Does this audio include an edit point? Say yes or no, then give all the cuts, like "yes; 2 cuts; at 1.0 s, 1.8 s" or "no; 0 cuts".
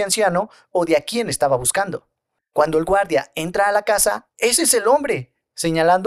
yes; 1 cut; at 4.3 s